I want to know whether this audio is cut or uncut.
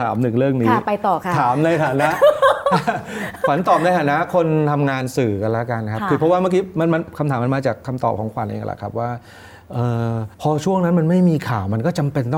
cut